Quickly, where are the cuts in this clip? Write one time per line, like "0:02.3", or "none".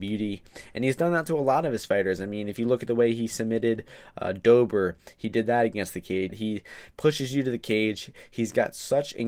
0:06.3